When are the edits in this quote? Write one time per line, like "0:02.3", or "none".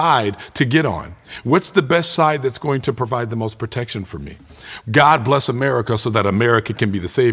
0:04.8